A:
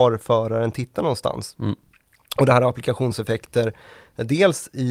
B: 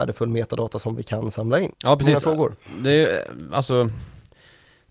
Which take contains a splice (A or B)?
B